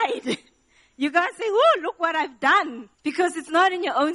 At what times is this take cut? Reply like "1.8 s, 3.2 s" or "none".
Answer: 2.9 s